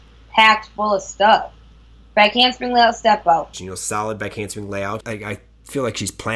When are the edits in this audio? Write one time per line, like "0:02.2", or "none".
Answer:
0:03.5
0:05.0